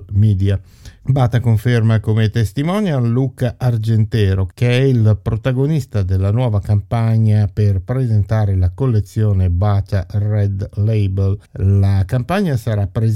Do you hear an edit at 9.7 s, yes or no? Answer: no